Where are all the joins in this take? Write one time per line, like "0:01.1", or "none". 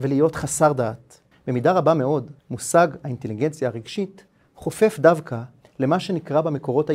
0:01.3
0:02.4